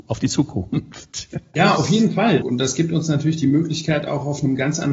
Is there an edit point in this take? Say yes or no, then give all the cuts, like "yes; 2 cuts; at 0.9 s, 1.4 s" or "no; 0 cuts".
yes; 1 cut; at 2.4 s